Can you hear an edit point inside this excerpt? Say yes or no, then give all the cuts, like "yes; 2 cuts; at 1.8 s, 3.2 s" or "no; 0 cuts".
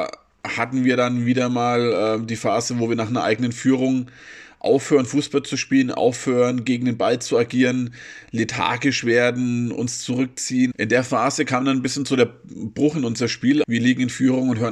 yes; 2 cuts; at 10.7 s, 13.6 s